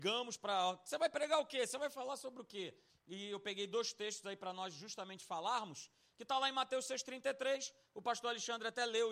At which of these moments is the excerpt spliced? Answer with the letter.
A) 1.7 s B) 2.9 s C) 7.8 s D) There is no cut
B